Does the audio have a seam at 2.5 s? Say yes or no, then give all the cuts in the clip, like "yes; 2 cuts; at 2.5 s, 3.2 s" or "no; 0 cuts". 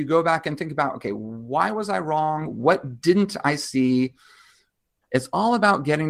no; 1 cut; at 5.0 s